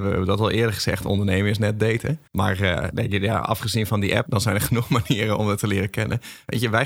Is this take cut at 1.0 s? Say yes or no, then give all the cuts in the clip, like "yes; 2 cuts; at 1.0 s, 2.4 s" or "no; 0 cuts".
no; 2 cuts; at 2.3 s, 4.3 s